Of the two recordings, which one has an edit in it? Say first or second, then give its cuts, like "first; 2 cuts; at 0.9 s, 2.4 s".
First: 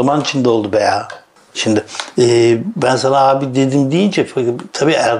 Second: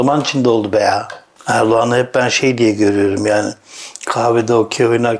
second; 1 cut; at 1.4 s